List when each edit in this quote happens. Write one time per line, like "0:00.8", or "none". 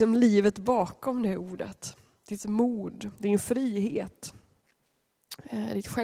none